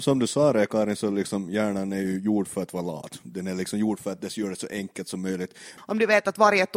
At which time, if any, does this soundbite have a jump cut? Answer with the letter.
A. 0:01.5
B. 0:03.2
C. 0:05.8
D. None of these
C